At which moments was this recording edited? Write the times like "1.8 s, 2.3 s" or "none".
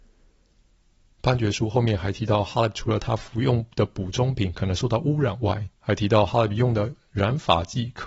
5.7 s